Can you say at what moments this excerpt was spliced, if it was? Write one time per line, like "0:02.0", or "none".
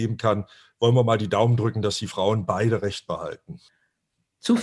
none